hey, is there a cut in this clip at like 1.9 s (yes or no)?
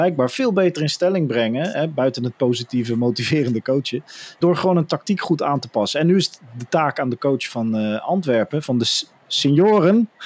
no